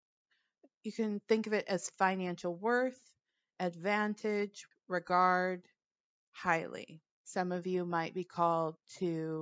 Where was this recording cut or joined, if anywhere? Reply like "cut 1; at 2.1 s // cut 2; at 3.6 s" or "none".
cut 1; at 4.7 s // cut 2; at 7.2 s